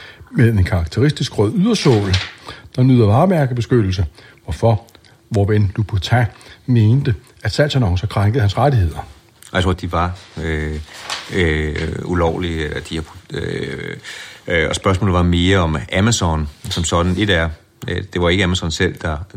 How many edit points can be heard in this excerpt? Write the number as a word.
one